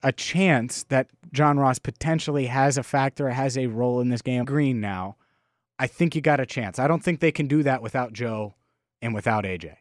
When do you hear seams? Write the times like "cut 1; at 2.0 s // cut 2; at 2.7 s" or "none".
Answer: cut 1; at 4.4 s